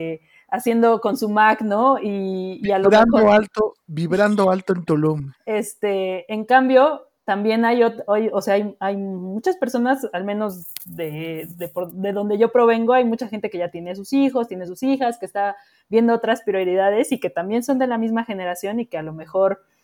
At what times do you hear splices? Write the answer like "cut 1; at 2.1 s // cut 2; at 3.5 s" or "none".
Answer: cut 1; at 5.4 s